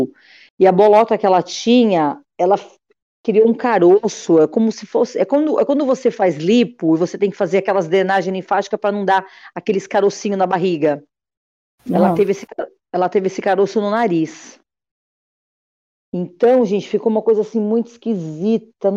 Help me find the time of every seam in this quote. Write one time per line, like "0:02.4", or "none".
none